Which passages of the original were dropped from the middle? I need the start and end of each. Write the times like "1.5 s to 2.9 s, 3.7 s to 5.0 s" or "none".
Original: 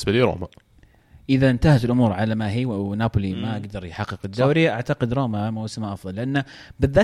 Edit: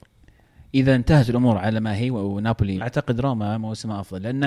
3.4 s to 4.7 s